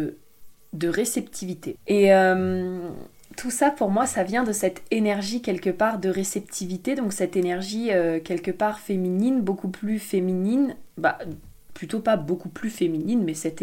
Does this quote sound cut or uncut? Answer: cut